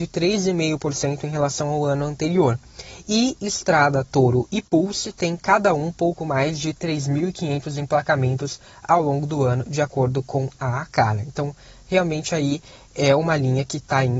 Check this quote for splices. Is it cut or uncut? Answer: uncut